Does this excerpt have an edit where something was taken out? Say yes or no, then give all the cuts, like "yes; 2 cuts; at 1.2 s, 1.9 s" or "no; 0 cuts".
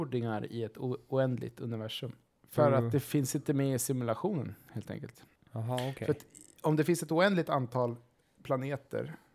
no; 0 cuts